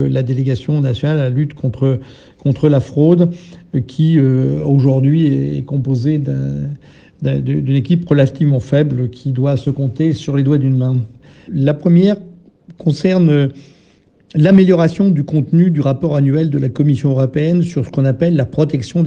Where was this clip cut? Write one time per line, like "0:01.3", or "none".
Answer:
0:11.5